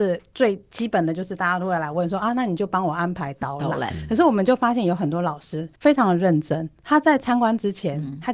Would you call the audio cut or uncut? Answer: cut